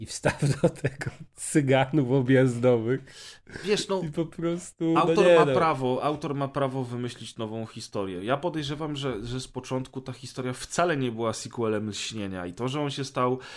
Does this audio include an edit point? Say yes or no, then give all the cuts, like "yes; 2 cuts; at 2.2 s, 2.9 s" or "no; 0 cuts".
no; 0 cuts